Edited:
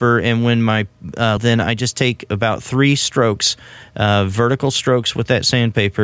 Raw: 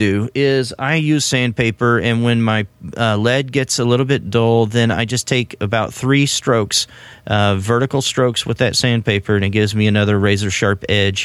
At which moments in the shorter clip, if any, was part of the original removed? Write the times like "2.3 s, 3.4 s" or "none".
1.4 s